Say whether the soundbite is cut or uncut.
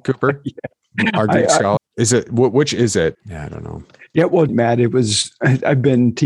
cut